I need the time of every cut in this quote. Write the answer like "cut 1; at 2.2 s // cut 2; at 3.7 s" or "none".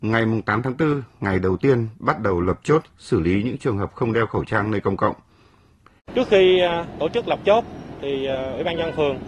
cut 1; at 6.0 s